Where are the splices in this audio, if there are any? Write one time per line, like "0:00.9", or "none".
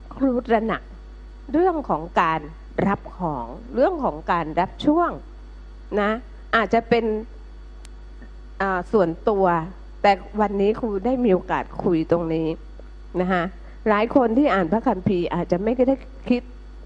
none